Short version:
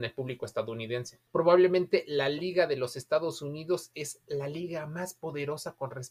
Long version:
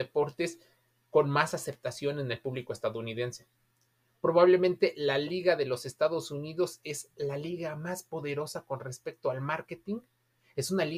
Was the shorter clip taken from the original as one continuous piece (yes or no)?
no